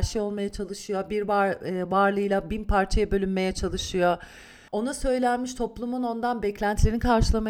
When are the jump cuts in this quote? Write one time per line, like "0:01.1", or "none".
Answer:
0:04.7